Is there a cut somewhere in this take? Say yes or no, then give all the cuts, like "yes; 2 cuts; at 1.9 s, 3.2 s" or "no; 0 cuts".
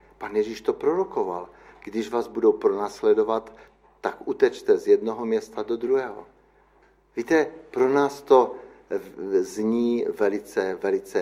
no; 0 cuts